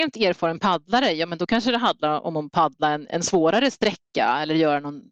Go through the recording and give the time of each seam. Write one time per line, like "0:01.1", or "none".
none